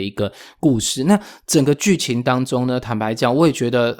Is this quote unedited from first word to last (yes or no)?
yes